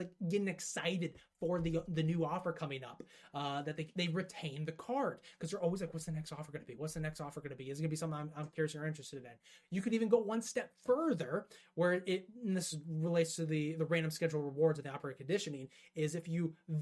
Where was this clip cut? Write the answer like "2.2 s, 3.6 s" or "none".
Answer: none